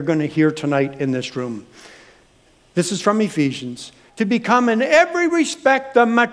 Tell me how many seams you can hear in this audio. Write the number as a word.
one